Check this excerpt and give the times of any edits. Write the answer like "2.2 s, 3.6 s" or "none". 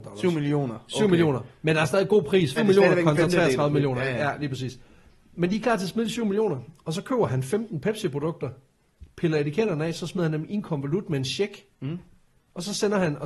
2.6 s